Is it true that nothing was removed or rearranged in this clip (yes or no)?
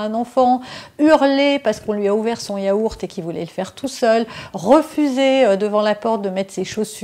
yes